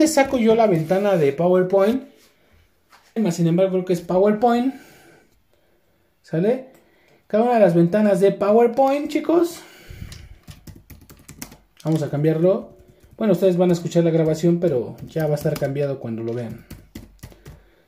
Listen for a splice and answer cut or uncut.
cut